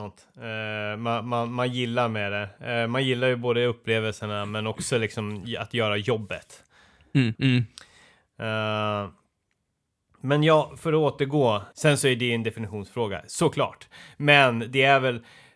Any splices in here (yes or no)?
yes